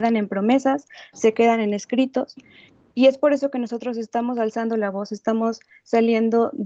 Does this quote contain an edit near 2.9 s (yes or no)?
no